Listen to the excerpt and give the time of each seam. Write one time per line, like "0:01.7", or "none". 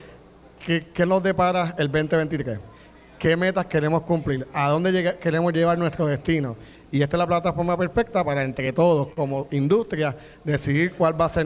none